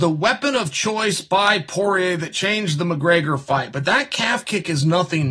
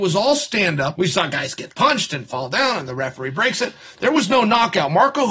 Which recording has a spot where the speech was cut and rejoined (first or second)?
second